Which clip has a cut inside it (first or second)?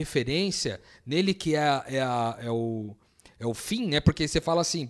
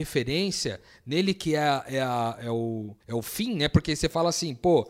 second